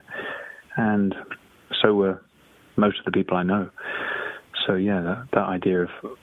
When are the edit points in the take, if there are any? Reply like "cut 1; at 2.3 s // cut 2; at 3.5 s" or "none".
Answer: none